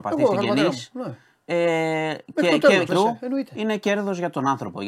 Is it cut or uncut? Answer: cut